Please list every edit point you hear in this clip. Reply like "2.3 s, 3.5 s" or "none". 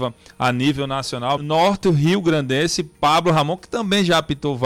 1.4 s